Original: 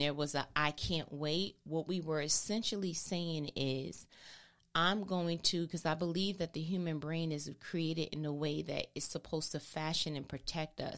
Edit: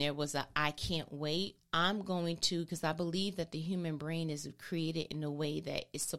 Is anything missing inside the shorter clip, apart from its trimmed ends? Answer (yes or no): yes